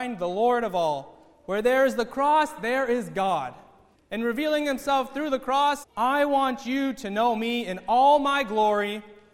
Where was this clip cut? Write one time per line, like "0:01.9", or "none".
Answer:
0:03.9
0:05.8